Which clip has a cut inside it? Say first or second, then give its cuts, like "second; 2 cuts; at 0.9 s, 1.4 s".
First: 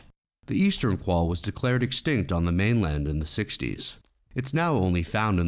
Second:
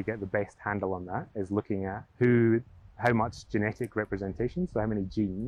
second; 1 cut; at 2.1 s